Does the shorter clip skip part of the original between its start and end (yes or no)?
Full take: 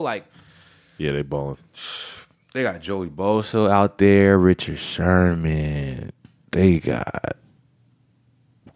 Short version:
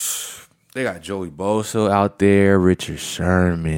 no